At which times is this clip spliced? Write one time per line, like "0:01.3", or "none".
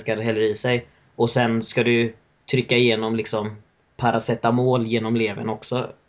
none